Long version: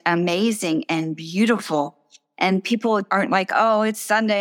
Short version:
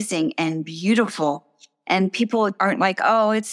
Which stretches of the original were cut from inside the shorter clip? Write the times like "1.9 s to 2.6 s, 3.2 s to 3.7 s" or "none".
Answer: none